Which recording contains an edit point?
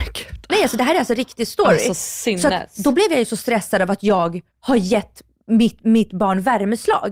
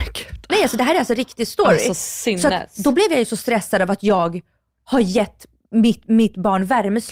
first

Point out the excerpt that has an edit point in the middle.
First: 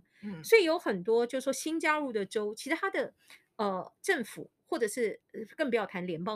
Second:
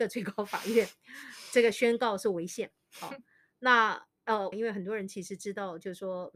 second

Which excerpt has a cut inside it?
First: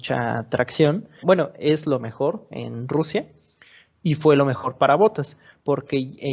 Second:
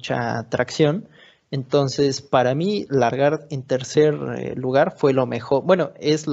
first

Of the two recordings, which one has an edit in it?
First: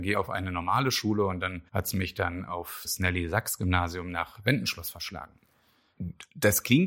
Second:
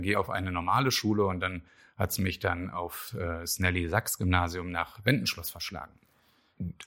first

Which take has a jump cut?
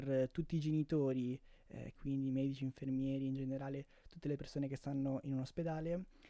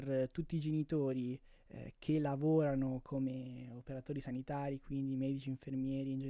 first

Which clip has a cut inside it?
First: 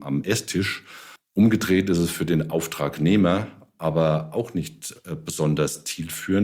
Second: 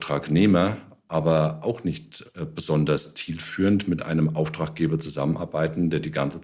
first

